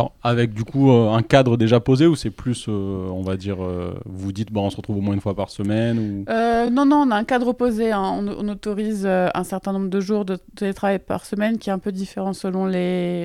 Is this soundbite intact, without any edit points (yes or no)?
yes